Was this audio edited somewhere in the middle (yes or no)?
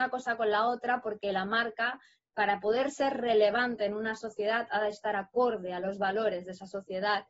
no